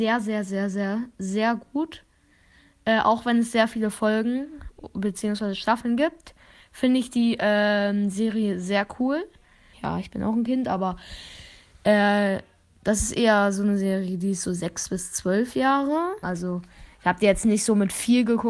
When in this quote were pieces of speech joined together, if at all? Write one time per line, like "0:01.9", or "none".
0:09.7
0:16.2